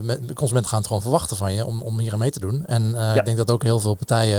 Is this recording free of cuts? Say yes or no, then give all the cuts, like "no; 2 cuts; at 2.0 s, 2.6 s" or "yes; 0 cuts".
yes; 0 cuts